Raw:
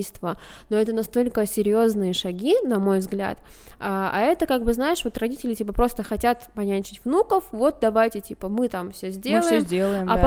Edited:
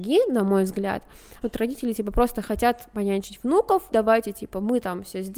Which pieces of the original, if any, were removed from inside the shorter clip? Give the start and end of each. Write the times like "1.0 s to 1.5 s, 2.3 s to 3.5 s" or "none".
3.8 s to 5.0 s, 7.5 s to 7.8 s